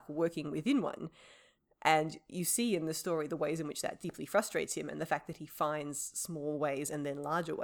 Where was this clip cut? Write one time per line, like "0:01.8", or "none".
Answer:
none